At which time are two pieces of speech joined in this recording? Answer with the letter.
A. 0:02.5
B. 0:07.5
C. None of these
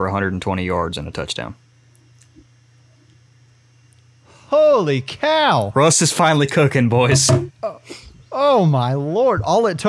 B